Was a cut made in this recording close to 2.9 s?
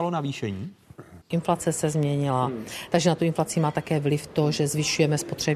no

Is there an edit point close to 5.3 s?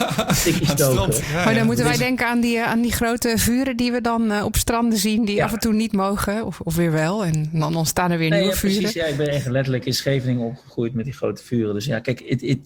no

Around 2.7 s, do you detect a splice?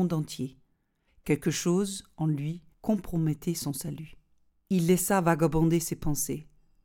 yes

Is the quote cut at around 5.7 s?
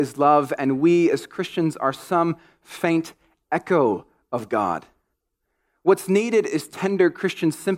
no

